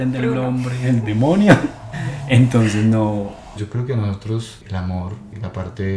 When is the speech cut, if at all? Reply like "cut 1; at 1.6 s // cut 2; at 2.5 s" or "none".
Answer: cut 1; at 1.9 s // cut 2; at 3.6 s